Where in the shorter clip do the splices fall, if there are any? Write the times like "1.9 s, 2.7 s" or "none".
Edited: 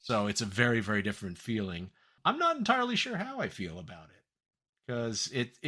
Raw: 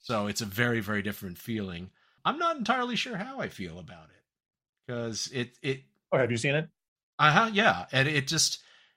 none